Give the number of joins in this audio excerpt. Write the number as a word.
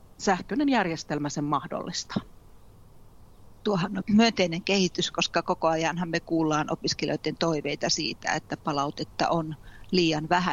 one